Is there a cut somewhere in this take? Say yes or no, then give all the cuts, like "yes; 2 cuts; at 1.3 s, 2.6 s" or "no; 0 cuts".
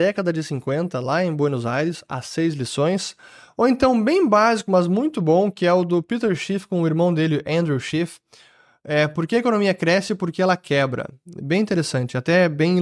no; 0 cuts